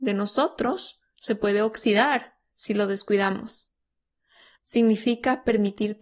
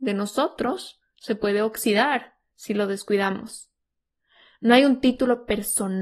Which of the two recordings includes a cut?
first; 1 cut; at 4.6 s

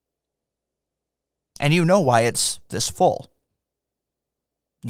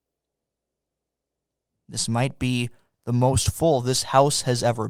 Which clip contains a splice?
first; 1 cut; at 1.5 s

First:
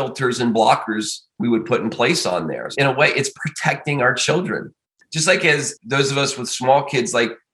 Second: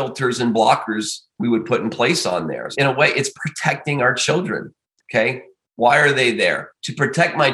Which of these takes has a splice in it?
second; 1 cut; at 5.0 s

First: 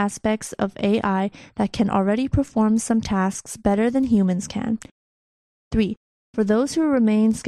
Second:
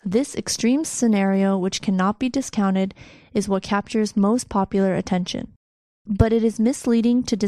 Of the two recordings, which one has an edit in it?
first; 1 cut; at 6.2 s

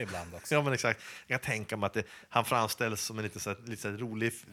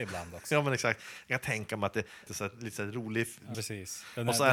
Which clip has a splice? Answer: second; 2 cuts; at 2.3 s, 3.5 s

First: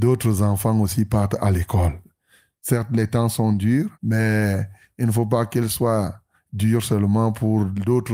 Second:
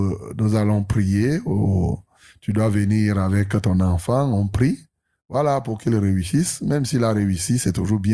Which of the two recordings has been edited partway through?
first; 1 cut; at 3.9 s

